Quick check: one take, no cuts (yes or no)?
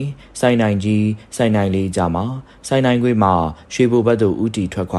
yes